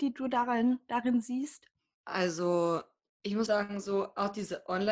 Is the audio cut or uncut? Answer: cut